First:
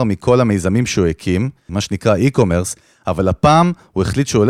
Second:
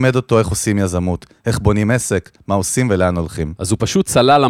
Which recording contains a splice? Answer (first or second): first